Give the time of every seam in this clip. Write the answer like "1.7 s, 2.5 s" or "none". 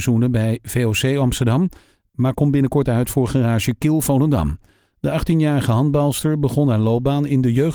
none